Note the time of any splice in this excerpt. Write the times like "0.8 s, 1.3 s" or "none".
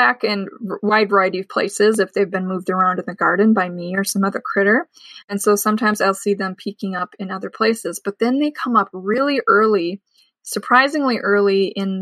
none